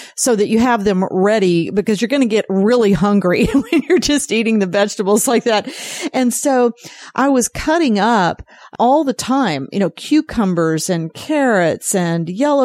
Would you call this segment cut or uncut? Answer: uncut